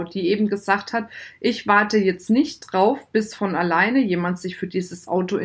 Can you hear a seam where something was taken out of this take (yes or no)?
no